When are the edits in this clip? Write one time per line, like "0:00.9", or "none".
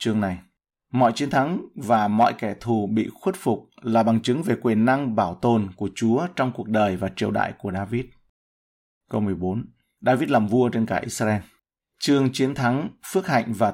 none